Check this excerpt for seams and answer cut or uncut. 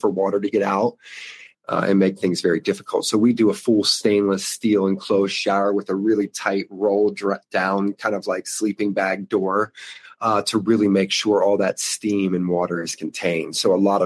cut